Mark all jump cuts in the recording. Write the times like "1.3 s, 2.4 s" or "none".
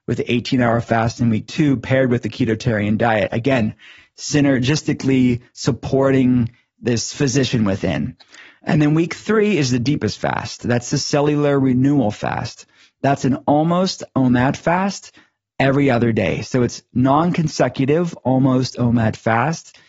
none